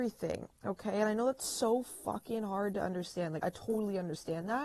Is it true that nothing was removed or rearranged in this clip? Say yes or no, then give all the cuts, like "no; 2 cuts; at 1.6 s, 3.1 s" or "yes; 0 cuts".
no; 1 cut; at 3.4 s